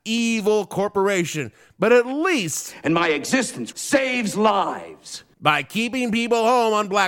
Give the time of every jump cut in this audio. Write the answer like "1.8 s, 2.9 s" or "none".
3.7 s